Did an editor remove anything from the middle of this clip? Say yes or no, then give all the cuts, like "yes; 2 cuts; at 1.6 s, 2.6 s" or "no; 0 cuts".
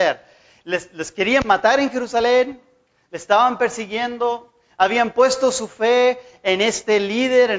no; 0 cuts